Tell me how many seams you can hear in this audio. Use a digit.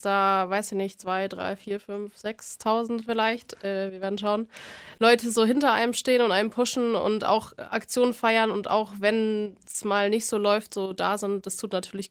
0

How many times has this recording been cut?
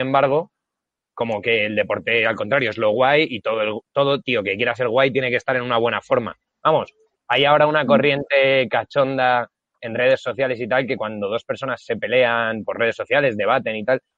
0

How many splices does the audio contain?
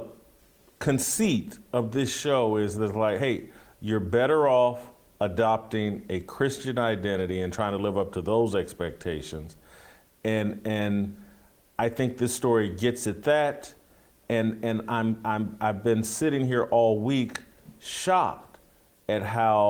0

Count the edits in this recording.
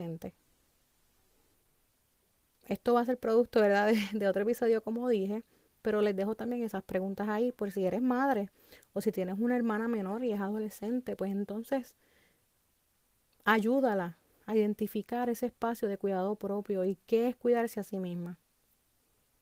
0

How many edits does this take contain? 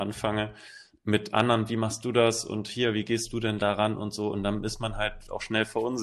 0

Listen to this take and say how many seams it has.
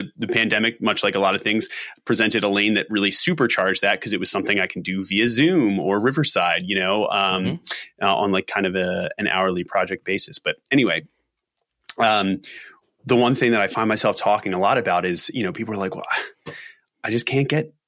0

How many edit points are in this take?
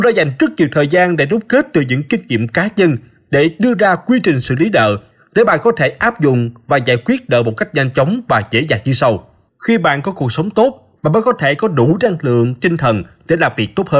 2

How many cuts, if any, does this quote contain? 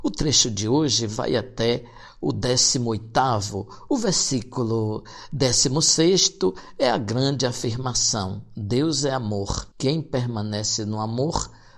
1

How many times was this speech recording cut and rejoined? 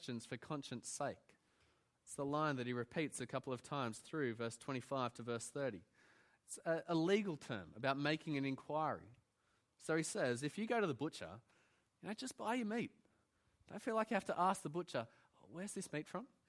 0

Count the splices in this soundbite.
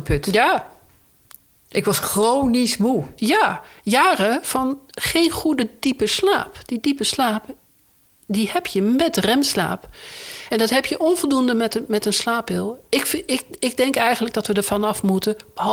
0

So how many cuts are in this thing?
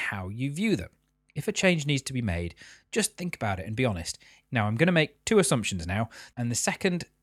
2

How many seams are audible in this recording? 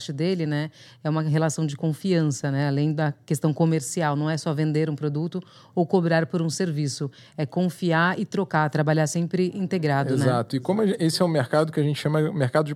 0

